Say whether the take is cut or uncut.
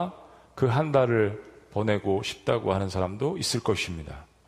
uncut